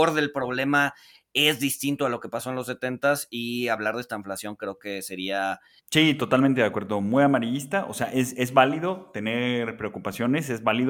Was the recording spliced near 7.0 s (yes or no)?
no